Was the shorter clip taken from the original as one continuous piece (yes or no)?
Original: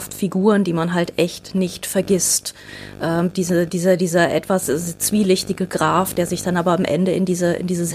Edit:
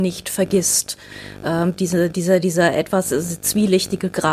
yes